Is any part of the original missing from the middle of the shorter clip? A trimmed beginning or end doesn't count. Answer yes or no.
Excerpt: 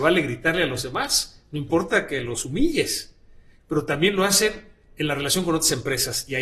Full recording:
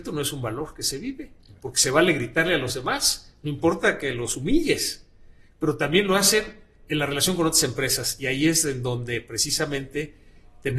no